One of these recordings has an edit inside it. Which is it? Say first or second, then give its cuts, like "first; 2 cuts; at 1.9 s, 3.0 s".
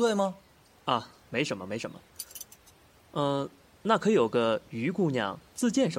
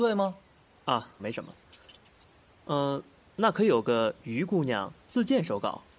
second; 1 cut; at 1.2 s